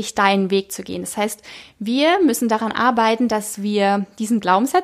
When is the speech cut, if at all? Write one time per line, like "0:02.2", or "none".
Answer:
none